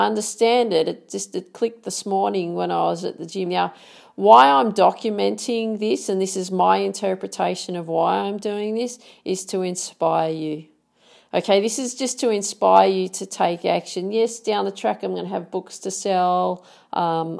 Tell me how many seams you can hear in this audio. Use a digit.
1